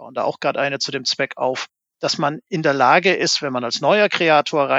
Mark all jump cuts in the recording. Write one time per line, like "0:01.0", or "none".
none